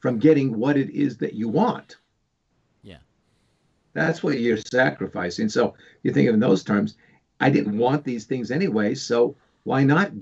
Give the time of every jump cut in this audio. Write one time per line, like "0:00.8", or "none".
0:07.6